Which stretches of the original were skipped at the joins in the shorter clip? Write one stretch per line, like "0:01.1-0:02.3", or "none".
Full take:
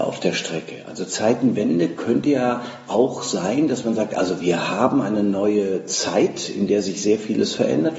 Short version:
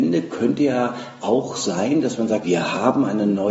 0:04.1-0:04.4